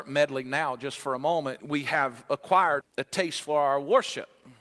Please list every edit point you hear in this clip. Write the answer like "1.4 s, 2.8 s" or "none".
1.6 s, 2.8 s